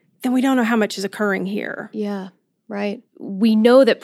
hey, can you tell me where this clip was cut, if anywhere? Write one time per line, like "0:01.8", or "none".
none